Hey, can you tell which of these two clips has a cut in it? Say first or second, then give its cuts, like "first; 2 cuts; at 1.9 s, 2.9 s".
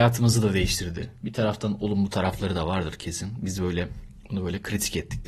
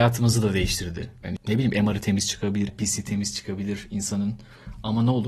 second; 2 cuts; at 1.2 s, 2.7 s